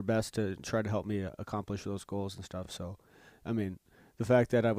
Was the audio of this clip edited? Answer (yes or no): no